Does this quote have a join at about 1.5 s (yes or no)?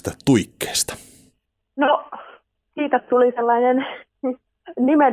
no